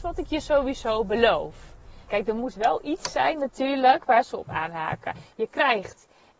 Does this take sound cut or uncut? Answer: cut